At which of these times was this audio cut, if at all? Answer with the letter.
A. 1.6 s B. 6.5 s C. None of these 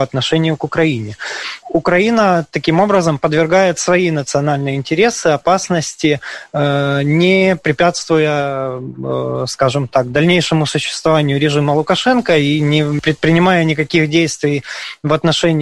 A